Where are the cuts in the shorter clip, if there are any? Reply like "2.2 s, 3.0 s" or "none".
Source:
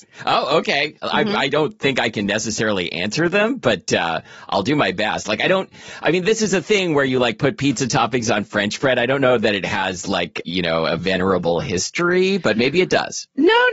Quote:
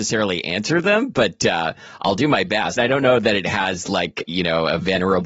2.8 s

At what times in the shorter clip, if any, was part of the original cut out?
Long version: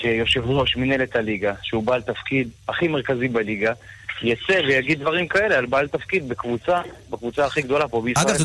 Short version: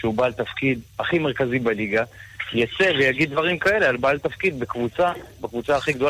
none

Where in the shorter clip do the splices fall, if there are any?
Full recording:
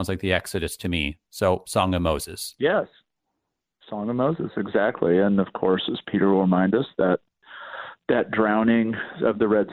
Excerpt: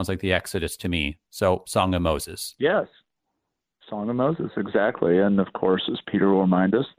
none

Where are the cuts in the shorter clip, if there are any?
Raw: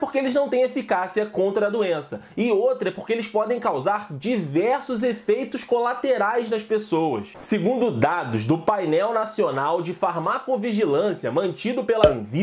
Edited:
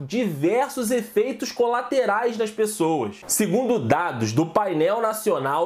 none

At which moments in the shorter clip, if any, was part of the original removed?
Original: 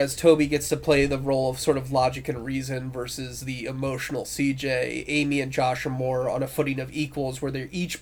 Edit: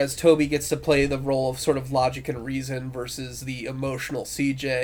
none

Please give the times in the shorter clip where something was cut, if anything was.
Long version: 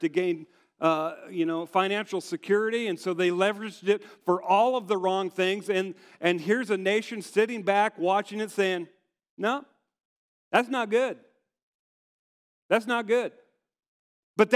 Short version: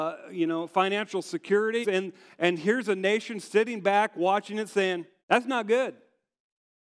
1.8 s, 5.2 s

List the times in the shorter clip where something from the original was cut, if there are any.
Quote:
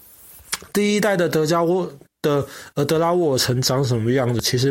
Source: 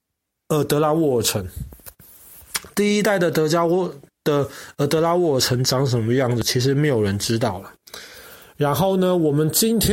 none

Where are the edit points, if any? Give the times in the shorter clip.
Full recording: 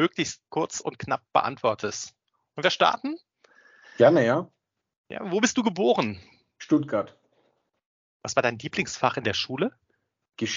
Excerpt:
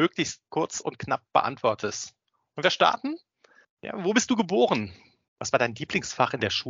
3.6 s, 5.3 s

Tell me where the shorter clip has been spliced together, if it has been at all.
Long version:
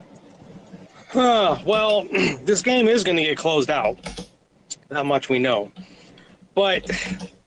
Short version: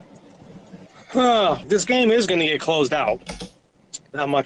1.6 s

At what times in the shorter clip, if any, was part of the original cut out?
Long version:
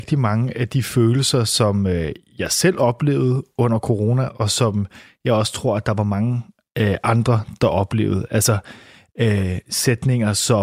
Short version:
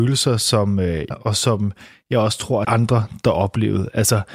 1.1 s, 2.6 s

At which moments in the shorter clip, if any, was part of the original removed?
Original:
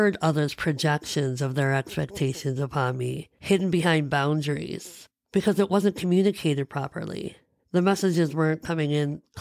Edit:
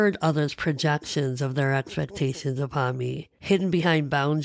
none

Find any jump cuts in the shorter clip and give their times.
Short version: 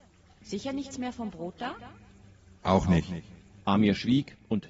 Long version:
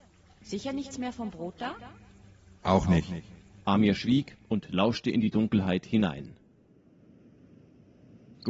none

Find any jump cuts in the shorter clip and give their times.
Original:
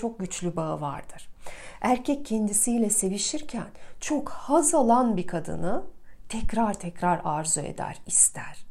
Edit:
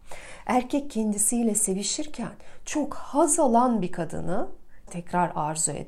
4.9 s

